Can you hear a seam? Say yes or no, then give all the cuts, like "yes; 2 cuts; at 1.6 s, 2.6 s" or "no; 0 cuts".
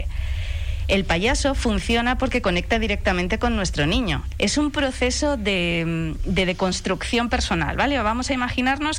yes; 1 cut; at 4.3 s